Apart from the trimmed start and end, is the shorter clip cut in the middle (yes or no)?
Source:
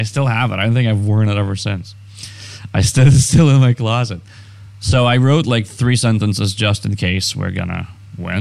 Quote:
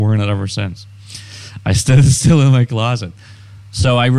no